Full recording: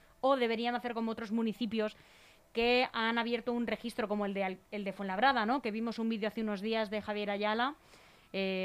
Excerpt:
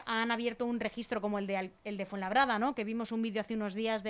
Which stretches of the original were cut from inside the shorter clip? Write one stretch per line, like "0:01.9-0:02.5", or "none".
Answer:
none